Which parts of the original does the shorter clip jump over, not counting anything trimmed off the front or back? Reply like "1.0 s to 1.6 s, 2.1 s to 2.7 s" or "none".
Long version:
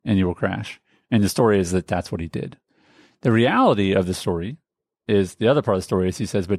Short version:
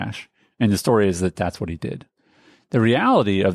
none